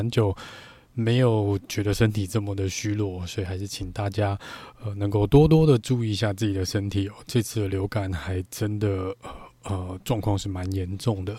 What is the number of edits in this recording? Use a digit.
0